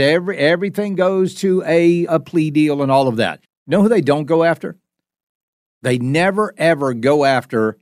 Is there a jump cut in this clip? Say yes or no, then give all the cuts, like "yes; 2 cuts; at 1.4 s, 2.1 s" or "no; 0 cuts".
yes; 3 cuts; at 2.1 s, 3.4 s, 5.7 s